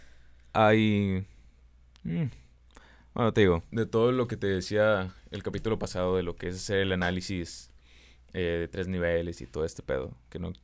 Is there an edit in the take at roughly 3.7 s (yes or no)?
yes